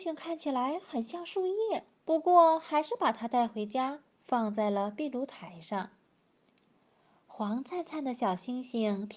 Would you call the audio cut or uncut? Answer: cut